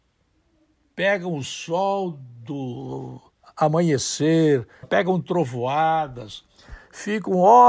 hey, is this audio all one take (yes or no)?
no